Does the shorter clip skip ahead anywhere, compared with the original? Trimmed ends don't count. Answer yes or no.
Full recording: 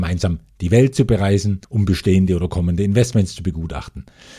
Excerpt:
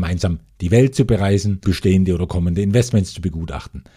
yes